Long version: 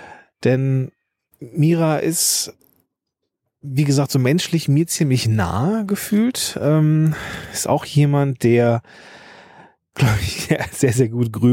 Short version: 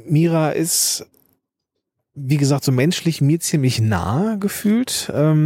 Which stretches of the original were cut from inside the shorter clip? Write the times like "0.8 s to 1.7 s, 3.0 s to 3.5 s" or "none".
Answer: none